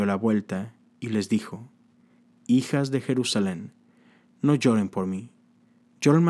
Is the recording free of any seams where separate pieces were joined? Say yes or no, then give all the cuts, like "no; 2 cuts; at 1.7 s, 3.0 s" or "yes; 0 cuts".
yes; 0 cuts